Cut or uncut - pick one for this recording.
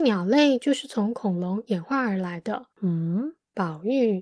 cut